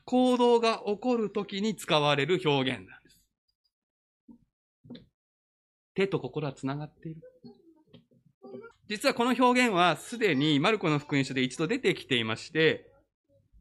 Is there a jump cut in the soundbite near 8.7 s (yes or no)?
yes